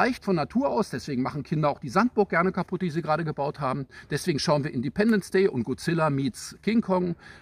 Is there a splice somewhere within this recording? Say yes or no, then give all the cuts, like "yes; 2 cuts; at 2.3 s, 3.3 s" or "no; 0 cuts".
no; 0 cuts